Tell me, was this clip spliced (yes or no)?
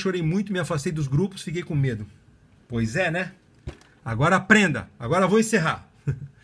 no